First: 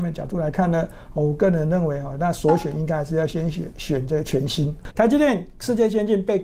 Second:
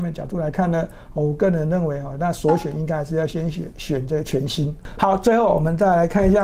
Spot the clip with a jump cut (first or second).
first